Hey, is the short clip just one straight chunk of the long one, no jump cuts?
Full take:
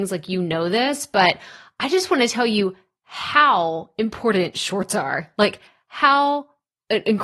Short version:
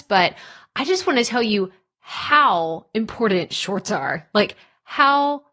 yes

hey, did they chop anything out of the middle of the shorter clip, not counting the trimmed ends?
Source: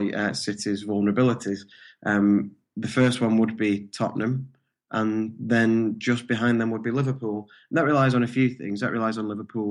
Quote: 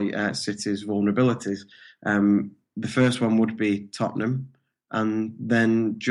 no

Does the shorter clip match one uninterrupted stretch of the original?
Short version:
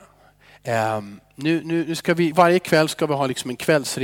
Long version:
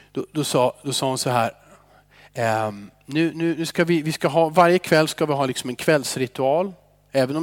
no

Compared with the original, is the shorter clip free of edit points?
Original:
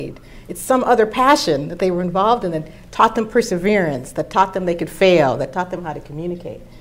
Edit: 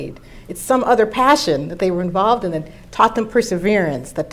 yes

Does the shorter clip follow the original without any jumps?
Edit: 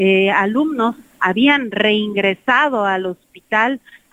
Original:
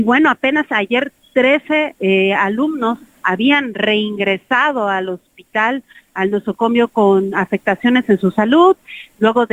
yes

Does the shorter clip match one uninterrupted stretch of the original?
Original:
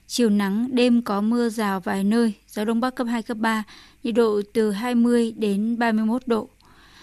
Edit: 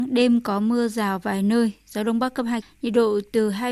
no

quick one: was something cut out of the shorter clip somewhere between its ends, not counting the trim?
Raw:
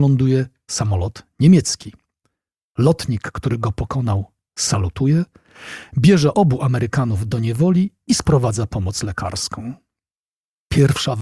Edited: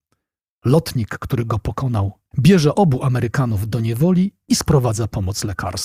yes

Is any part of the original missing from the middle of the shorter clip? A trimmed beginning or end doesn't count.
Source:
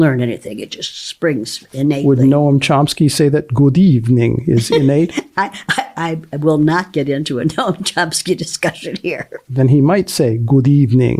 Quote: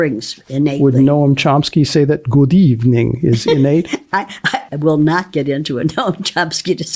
yes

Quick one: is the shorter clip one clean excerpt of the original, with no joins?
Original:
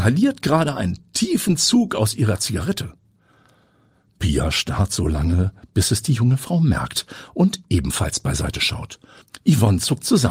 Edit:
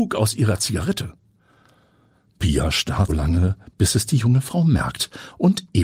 no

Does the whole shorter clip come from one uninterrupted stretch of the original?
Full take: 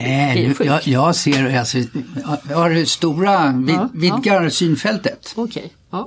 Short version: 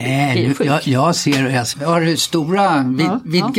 no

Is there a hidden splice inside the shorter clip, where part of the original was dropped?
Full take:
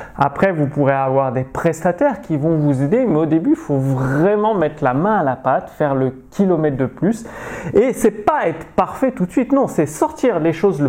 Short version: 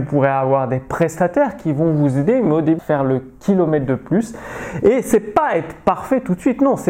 yes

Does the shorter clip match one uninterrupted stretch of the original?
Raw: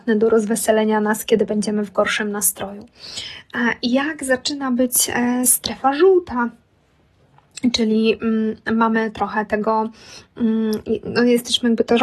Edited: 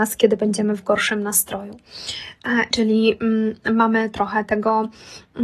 no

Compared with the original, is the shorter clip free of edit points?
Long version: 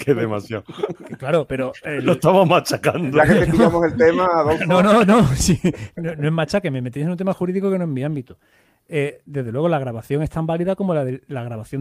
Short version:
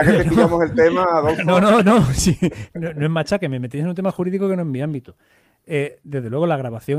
yes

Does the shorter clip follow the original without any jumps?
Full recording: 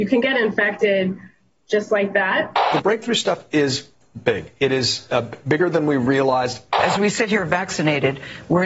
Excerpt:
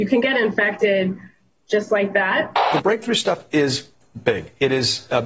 yes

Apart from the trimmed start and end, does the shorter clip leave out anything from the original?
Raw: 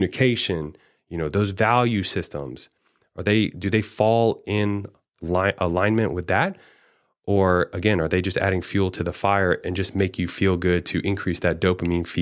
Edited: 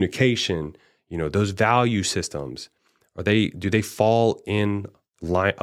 no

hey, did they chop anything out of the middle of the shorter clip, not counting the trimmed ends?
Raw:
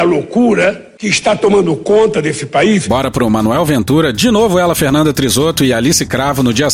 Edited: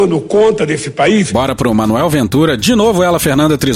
no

